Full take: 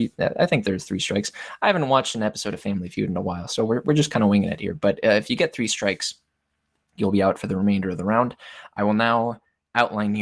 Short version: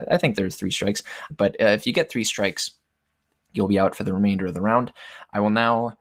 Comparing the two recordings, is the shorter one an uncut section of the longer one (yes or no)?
no